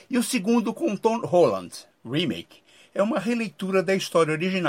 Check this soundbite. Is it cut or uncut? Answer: cut